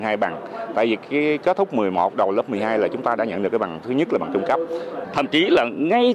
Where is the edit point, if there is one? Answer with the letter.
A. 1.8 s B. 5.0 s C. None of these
B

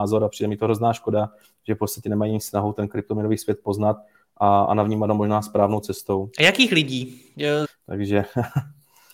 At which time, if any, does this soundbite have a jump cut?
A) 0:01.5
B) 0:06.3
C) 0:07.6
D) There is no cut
C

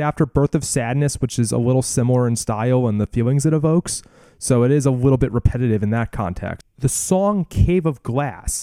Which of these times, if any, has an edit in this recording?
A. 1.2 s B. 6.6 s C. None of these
B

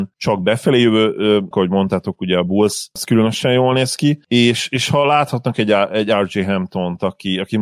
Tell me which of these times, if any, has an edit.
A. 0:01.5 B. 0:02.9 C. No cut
A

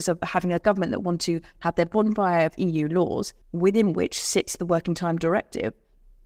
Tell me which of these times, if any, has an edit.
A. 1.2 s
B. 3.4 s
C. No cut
B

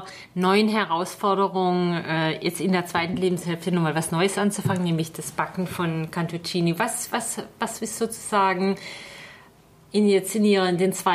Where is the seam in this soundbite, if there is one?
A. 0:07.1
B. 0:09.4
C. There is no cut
C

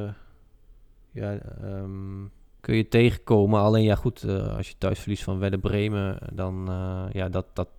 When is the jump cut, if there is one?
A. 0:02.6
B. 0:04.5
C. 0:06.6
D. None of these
A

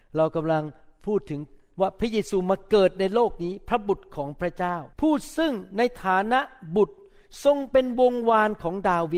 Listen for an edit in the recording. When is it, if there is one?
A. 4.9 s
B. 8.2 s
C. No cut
A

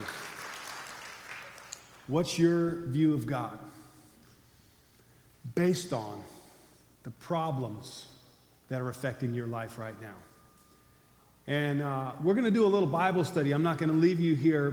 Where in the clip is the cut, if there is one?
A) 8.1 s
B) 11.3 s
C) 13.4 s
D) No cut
D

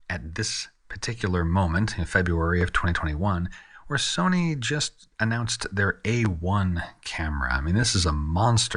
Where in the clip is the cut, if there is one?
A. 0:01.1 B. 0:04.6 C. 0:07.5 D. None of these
D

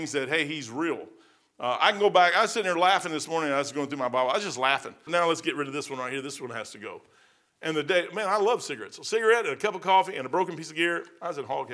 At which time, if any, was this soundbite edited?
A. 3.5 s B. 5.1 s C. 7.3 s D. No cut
B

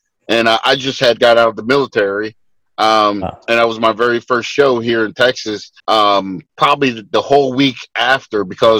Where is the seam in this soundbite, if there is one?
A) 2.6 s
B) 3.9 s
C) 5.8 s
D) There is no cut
C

